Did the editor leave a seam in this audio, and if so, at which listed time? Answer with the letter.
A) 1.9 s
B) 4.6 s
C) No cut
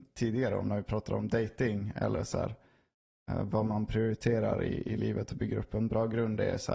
C